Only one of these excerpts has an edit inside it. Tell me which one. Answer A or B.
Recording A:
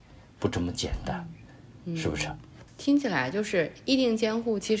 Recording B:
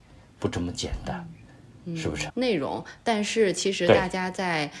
B